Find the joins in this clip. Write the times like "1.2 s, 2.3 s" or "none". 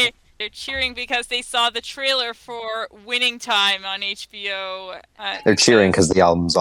none